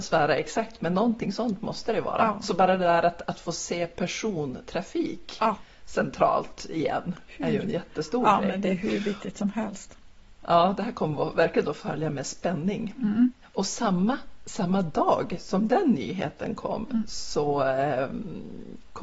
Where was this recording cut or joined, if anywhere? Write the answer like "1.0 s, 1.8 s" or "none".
none